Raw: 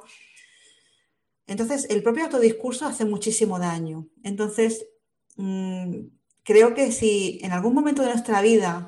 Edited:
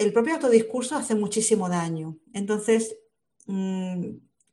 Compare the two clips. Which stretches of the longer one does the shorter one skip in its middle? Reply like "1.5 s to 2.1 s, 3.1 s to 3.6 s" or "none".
none